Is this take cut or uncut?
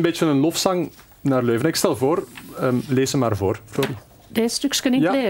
uncut